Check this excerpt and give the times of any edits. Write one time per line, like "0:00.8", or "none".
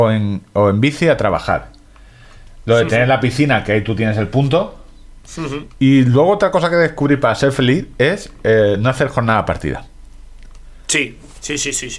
none

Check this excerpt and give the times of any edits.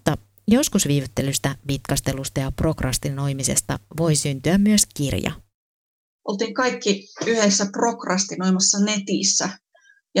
none

